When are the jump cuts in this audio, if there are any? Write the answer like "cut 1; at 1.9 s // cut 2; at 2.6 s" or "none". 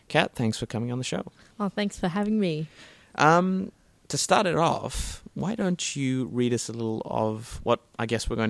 none